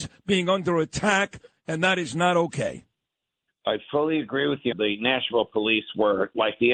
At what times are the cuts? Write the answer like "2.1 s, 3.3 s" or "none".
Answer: 3.5 s, 4.7 s